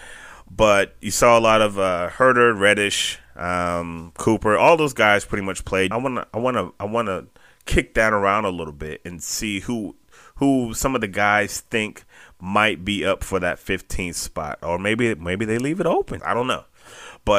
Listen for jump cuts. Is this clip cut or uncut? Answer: cut